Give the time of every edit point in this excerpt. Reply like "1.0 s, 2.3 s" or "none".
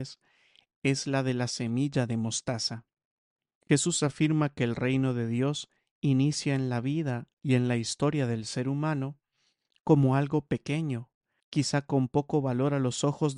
3.6 s, 11.4 s